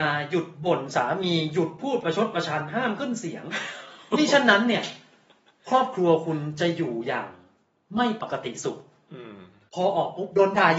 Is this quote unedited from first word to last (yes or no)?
yes